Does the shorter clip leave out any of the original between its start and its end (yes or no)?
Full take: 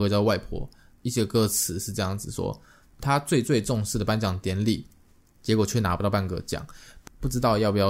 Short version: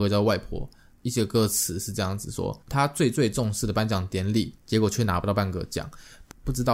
yes